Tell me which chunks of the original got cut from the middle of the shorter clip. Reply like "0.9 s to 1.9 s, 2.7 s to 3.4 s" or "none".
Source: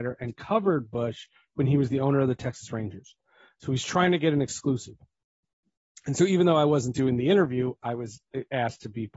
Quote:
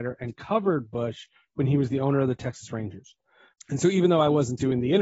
3.5 s to 5.9 s